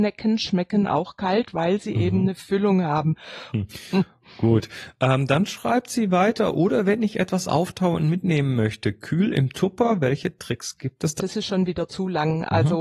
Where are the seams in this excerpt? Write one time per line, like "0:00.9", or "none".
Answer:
0:03.5
0:11.2